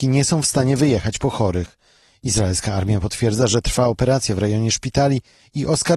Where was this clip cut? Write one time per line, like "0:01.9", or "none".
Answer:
none